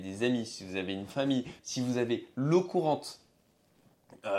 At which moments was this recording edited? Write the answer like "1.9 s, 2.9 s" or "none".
1.6 s

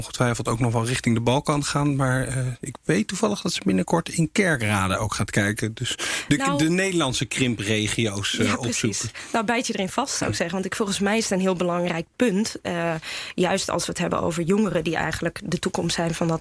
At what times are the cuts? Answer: none

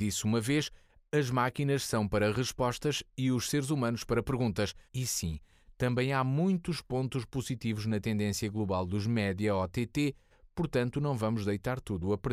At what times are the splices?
4.9 s

